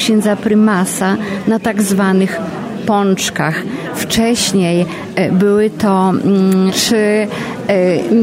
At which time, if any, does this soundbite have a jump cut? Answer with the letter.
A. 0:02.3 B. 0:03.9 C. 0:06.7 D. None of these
C